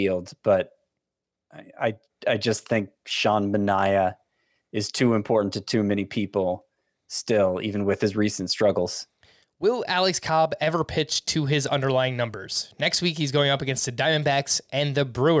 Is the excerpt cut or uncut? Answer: uncut